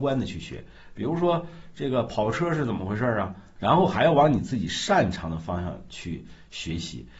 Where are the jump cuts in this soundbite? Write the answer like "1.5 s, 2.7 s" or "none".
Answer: 3.6 s